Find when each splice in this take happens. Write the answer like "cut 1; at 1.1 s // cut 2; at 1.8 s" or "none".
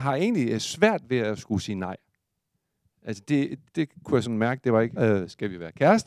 cut 1; at 3.6 s // cut 2; at 5.0 s